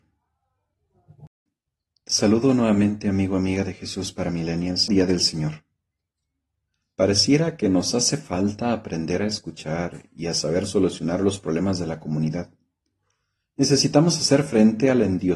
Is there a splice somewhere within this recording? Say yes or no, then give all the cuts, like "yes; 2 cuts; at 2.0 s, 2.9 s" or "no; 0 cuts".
yes; 1 cut; at 4.9 s